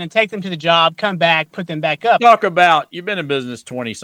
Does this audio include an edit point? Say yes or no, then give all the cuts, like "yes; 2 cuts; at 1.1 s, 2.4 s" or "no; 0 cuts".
yes; 1 cut; at 2.2 s